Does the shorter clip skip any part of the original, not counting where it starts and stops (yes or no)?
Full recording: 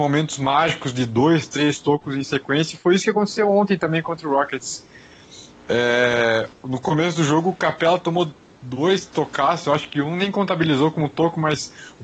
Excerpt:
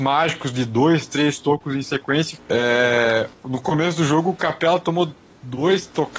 yes